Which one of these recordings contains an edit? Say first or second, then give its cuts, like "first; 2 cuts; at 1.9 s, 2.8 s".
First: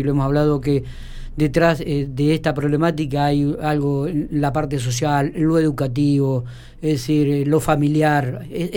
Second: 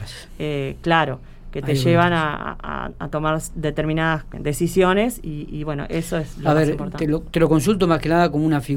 second; 1 cut; at 4.3 s